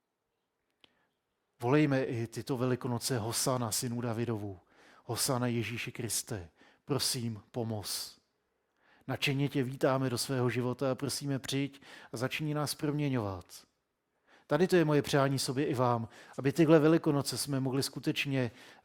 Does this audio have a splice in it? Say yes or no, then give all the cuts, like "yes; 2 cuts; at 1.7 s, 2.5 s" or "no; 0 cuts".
no; 0 cuts